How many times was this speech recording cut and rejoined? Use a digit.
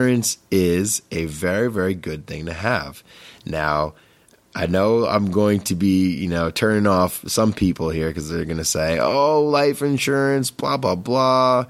0